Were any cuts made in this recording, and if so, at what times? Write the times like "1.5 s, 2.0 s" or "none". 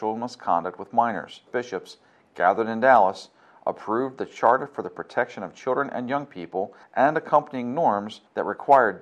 1.5 s